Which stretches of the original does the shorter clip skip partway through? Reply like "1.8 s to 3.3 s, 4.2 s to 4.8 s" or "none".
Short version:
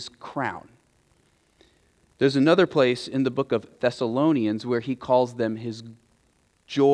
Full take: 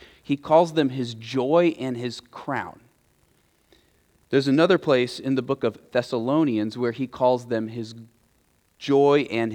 none